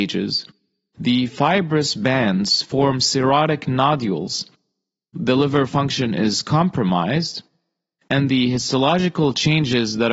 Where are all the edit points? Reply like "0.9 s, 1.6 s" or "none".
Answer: 8.3 s